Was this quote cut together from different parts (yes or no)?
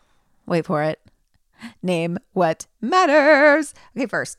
no